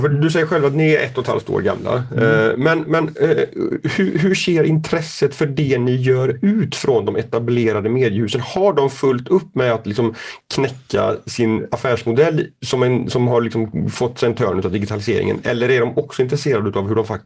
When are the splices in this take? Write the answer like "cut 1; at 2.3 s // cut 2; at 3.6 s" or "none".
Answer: none